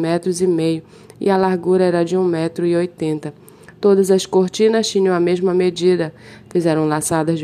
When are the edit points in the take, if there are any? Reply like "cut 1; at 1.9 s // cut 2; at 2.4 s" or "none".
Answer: cut 1; at 6.4 s